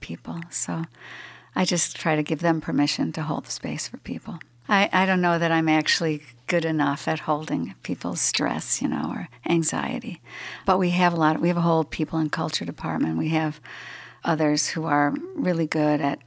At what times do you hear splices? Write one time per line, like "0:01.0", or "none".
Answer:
0:04.6
0:10.6